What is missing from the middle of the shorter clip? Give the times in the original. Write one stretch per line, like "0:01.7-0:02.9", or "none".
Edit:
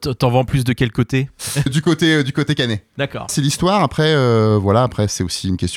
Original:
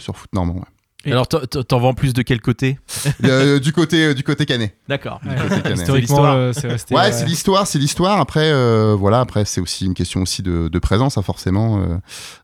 0:03.2-0:03.6
0:05.2-0:07.7